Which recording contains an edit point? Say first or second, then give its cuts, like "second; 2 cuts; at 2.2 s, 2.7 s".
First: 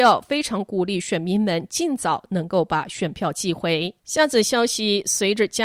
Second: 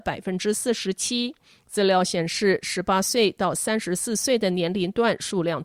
first; 1 cut; at 4.0 s